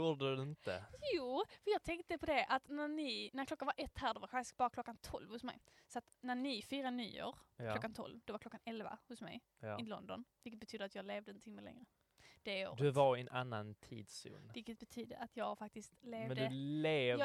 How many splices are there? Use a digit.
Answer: 0